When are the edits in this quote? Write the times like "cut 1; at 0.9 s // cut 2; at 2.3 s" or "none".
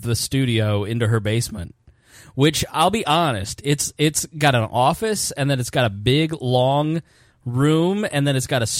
none